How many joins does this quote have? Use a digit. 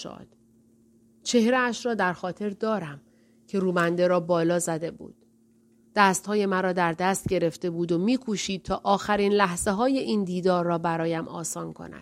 0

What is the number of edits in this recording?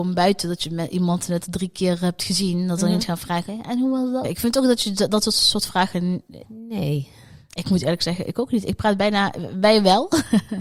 2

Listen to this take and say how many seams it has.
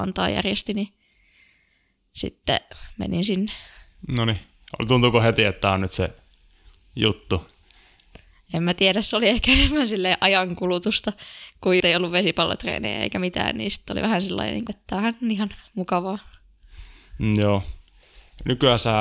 2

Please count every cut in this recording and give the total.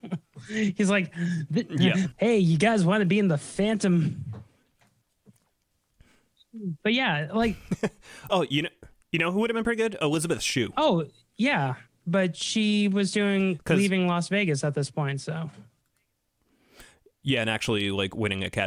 1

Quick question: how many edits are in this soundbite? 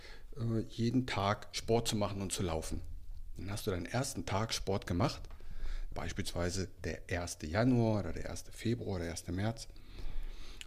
1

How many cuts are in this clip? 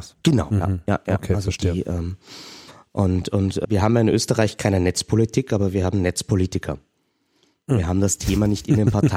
1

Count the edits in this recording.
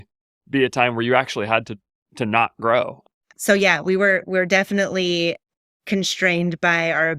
1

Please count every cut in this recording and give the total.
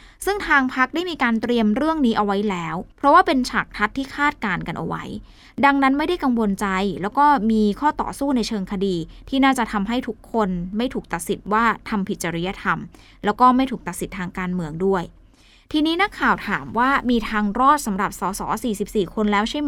1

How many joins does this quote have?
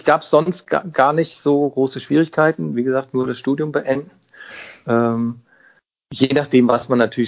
0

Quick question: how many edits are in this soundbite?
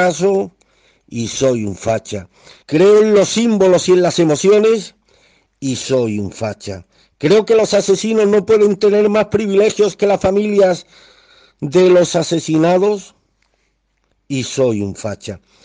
1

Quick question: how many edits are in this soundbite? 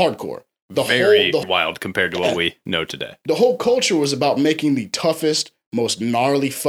1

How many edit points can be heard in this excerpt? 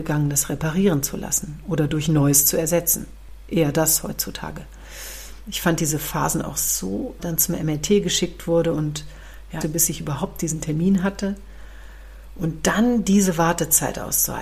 3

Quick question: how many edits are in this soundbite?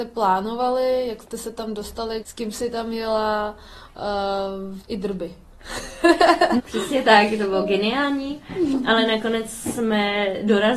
3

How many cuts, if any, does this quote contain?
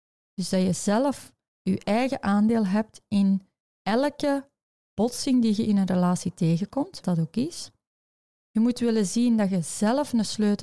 1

